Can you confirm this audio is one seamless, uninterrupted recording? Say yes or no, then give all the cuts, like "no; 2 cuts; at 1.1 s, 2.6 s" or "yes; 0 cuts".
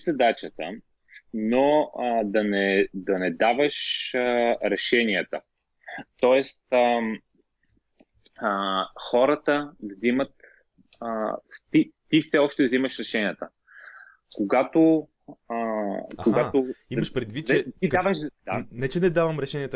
yes; 0 cuts